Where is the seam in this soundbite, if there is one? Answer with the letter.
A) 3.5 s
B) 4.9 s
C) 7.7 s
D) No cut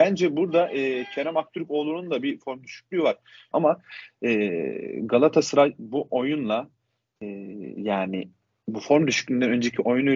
A